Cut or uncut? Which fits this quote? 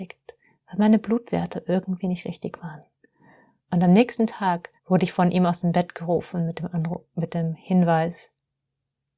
cut